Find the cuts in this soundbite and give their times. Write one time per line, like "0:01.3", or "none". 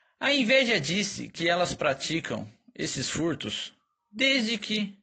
none